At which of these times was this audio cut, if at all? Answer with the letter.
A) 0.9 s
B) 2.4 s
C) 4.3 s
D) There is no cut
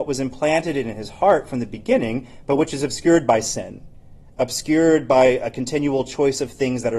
D